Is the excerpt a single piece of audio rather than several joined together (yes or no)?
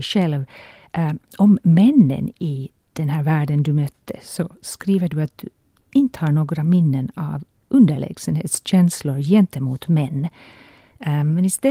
yes